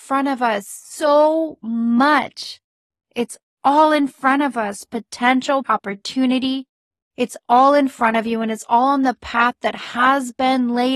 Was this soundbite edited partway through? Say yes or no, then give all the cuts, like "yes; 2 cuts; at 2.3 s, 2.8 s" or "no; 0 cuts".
yes; 1 cut; at 5.6 s